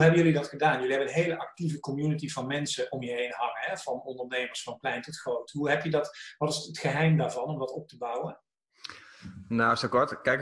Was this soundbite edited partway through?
no; 0 cuts

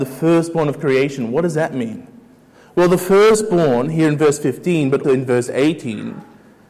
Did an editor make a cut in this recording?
yes; 1 cut; at 5.0 s

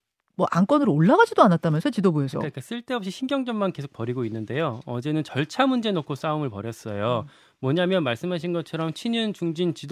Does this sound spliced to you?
no; 0 cuts

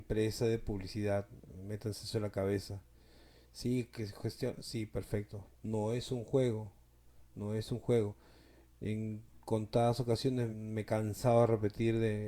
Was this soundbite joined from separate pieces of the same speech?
yes; 2 cuts; at 5.5 s, 10.5 s

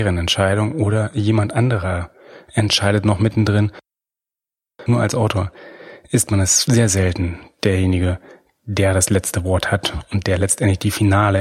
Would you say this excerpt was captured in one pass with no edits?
yes; 0 cuts

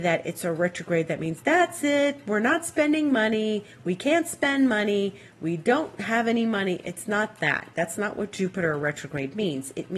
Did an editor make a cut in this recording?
no; 0 cuts

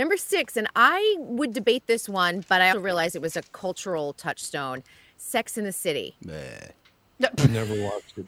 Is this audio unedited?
no; 1 cut; at 2.7 s

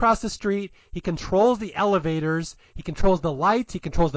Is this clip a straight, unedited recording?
yes; 0 cuts

